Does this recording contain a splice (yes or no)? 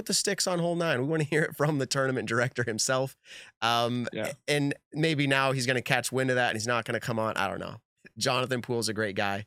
no